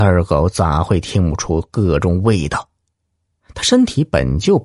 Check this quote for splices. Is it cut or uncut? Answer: uncut